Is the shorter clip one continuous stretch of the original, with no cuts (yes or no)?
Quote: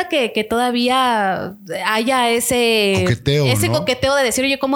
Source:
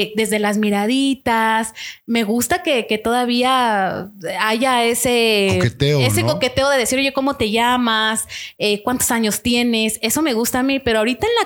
yes